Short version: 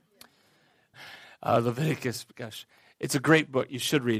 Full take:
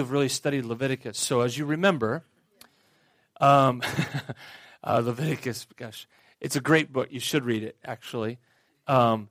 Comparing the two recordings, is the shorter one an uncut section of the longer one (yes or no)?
no